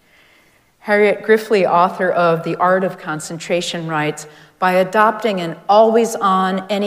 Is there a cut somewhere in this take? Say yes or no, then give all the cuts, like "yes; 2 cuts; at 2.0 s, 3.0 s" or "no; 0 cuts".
no; 0 cuts